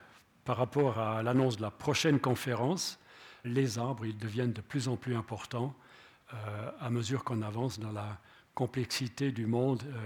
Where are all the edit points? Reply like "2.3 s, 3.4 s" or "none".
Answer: 3.4 s